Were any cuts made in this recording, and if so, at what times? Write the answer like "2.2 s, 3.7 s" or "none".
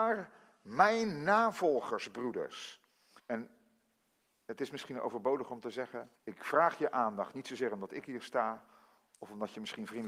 3.2 s, 6.2 s

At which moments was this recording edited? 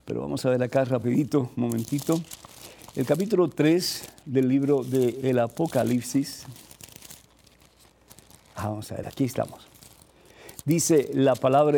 9.0 s

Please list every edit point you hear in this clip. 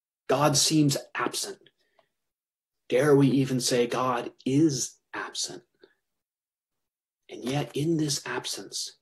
none

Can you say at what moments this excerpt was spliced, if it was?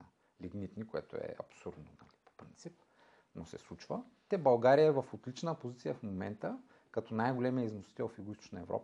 4.3 s

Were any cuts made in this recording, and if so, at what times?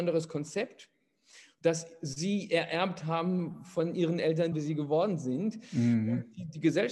4.5 s

